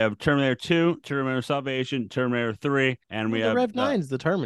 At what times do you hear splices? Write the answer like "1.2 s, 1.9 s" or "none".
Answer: 1.0 s, 3.0 s